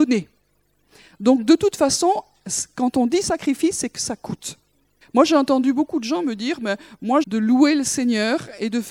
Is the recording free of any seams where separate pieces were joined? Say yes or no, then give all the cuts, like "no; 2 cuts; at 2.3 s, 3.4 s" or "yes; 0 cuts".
no; 2 cuts; at 5.0 s, 7.2 s